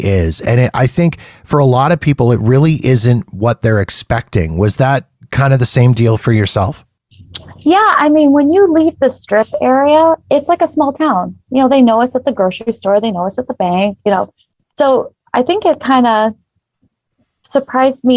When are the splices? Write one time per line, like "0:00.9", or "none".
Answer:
none